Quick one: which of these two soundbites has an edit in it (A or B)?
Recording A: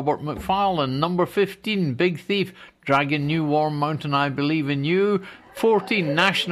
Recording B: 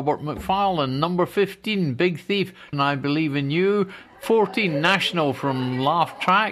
B